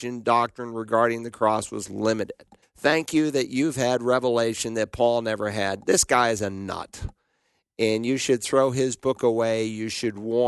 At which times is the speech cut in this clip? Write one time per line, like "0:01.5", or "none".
0:02.6